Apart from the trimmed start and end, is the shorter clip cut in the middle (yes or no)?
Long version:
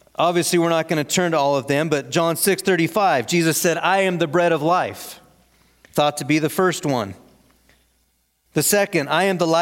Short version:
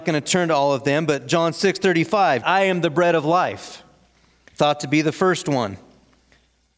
yes